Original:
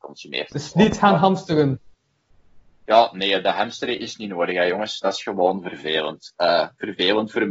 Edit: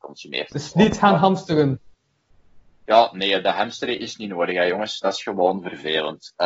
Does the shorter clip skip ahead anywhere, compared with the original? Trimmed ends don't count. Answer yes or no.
no